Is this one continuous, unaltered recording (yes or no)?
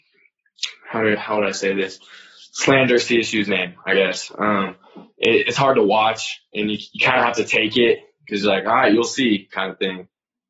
yes